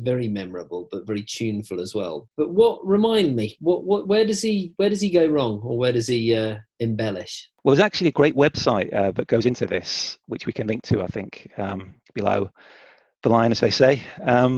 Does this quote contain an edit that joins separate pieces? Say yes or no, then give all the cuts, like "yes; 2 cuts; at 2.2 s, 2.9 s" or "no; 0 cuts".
no; 0 cuts